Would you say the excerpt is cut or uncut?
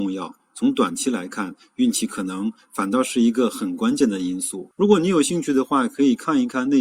uncut